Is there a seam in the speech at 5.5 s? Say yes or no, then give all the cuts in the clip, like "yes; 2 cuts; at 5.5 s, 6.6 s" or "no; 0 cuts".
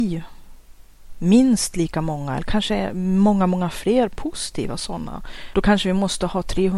yes; 1 cut; at 5.5 s